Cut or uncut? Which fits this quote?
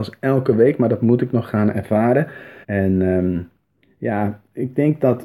cut